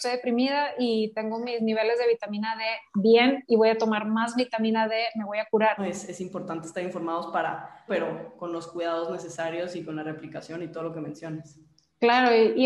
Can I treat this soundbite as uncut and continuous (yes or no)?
no